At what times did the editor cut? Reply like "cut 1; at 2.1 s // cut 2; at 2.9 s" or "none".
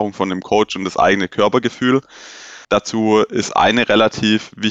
cut 1; at 2.6 s